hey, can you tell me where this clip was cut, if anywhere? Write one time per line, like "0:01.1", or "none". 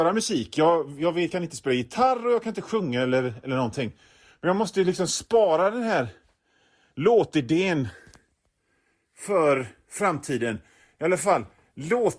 none

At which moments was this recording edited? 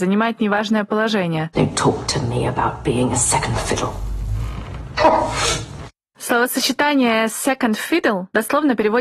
0:01.5
0:05.0

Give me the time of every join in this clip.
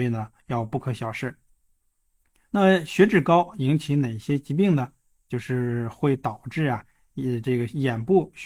none

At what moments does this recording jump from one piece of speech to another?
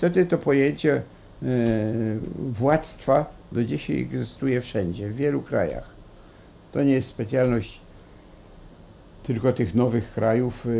none

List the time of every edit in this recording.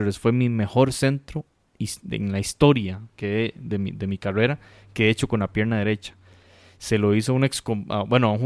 none

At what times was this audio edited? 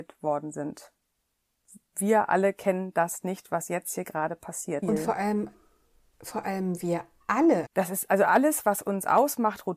0:04.8
0:07.6

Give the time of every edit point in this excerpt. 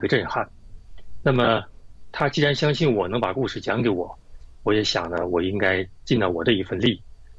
none

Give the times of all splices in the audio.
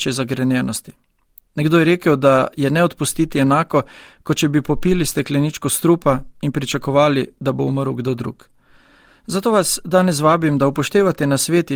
none

